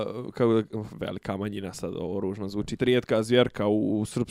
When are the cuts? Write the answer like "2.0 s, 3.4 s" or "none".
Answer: 2.8 s